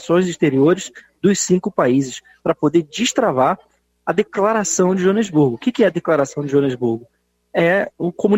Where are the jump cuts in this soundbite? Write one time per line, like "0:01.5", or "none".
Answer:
none